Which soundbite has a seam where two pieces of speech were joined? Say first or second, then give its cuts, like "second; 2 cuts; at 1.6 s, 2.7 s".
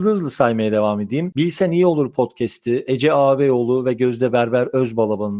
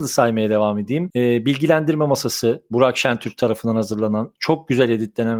first; 1 cut; at 1.3 s